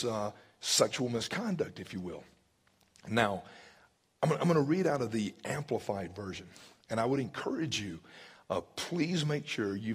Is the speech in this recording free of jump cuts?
yes; 0 cuts

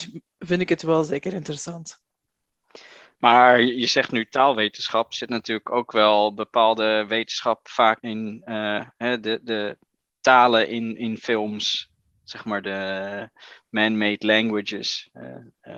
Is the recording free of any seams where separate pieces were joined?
no; 1 cut; at 8.0 s

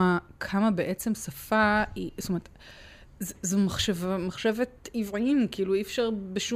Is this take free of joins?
yes; 0 cuts

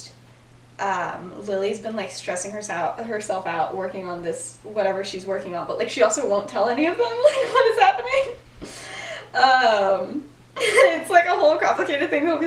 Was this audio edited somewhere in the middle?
no; 0 cuts

